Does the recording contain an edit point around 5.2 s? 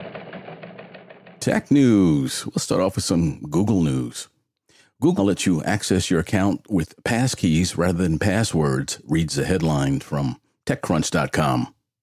yes; 1 cut; at 5.2 s

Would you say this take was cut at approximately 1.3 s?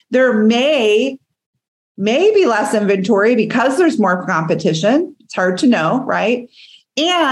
no; 0 cuts

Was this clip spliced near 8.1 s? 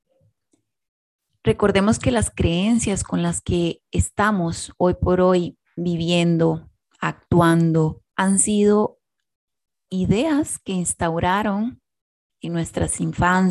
yes; 1 cut; at 8.1 s

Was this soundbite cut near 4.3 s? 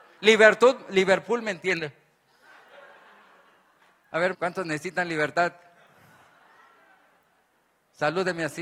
yes; 1 cut; at 4.3 s

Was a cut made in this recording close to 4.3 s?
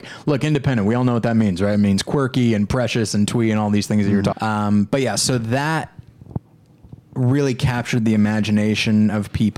yes; 1 cut; at 4.3 s

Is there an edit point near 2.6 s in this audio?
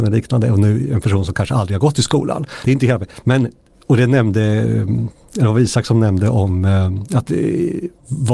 yes; 1 cut; at 2.6 s

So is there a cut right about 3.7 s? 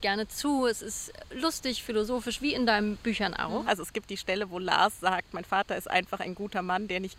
yes; 1 cut; at 3.7 s

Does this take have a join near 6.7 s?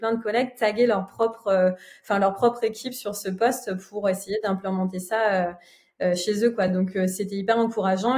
no; 0 cuts

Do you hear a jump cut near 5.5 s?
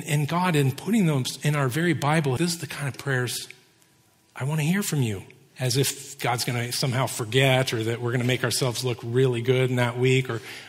yes; 2 cuts; at 2.4 s, 5.5 s

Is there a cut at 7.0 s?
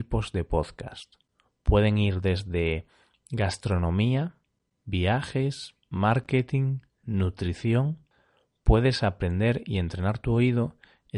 yes; 1 cut; at 7.0 s

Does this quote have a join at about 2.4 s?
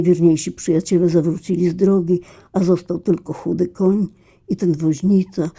no; 0 cuts

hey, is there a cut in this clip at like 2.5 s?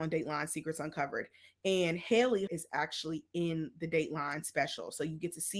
yes; 1 cut; at 2.5 s

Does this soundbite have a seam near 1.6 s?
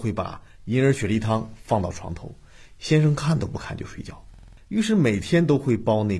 no; 1 cut; at 4.6 s

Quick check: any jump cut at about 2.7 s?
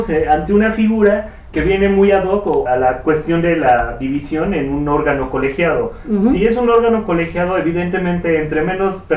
yes; 2 cuts; at 1.5 s, 2.7 s

